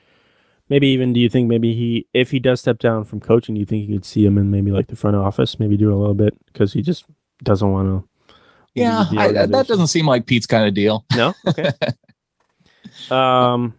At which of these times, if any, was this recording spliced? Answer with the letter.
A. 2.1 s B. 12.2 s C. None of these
C